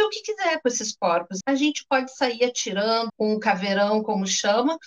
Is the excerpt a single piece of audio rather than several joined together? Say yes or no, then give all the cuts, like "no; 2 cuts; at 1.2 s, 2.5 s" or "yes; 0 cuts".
no; 2 cuts; at 1.4 s, 3.1 s